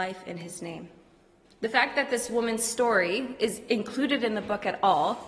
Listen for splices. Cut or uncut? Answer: cut